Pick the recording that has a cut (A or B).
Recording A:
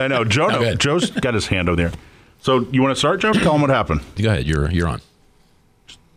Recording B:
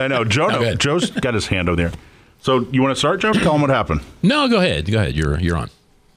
A